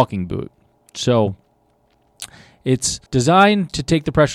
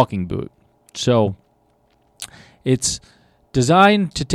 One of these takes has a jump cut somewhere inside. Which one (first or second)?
first